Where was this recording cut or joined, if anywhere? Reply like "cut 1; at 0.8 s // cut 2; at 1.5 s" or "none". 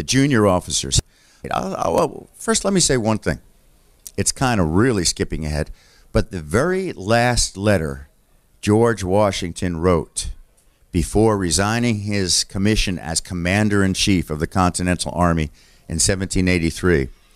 none